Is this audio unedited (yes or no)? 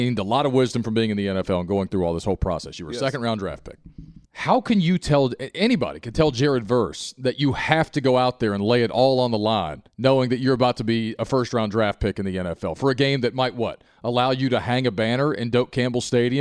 no